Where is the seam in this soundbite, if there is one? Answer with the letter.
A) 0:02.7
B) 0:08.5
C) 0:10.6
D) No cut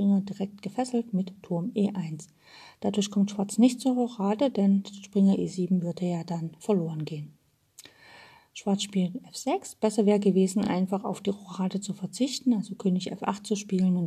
D